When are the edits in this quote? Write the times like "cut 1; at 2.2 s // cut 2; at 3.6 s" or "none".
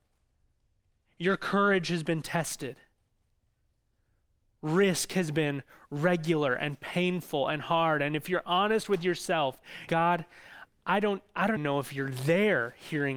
cut 1; at 9.9 s // cut 2; at 11.6 s